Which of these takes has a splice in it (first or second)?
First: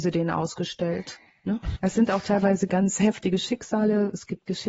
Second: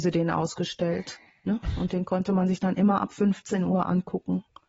first